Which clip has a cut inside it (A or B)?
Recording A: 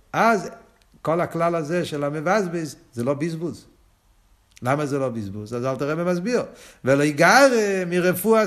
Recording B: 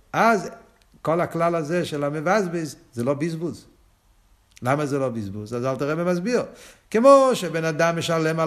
B